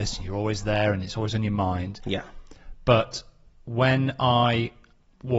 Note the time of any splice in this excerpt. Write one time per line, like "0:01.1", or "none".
none